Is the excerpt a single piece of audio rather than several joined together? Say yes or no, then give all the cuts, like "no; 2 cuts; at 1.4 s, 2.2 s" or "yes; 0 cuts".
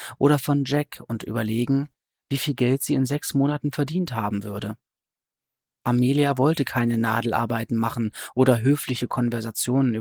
no; 1 cut; at 5.8 s